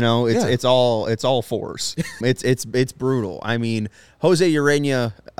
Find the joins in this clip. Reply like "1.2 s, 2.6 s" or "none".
2.2 s